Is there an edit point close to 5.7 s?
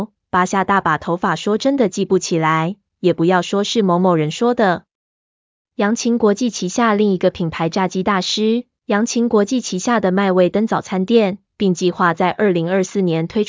yes; 3 cuts; at 5.7 s, 8.8 s, 11.5 s

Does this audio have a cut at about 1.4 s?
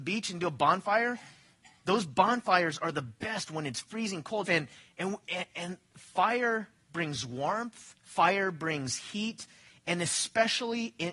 no; 2 cuts; at 4.4 s, 8.0 s

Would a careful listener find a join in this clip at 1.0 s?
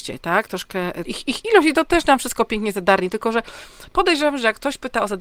yes; 1 cut; at 1.0 s

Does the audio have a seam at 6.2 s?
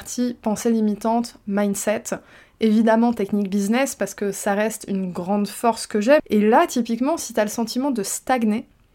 yes; 1 cut; at 6.2 s

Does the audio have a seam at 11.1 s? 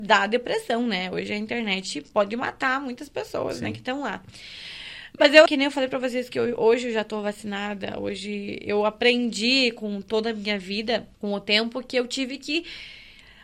yes; 2 cuts; at 5.5 s, 11.1 s

